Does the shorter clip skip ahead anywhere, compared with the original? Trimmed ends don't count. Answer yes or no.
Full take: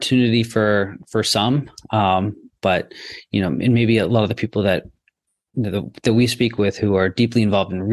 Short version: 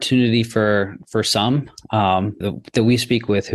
yes